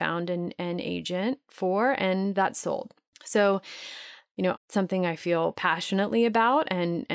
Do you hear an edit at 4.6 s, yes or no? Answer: yes